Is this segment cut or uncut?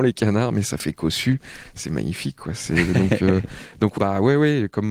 cut